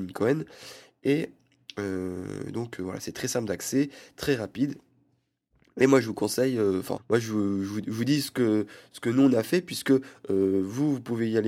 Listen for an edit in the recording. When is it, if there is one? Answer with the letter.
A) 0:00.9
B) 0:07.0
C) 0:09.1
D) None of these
B